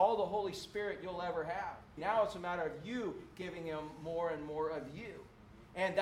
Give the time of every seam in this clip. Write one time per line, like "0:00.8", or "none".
0:02.0